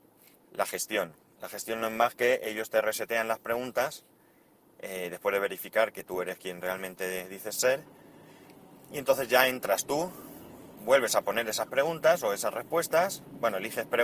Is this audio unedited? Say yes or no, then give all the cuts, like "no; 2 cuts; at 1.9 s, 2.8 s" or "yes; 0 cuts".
yes; 0 cuts